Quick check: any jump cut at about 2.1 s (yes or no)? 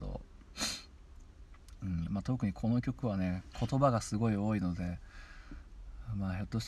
yes